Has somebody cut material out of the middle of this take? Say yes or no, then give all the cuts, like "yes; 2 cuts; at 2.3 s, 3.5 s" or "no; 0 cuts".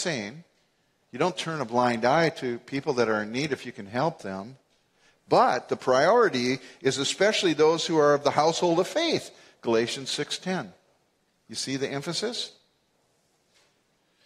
no; 0 cuts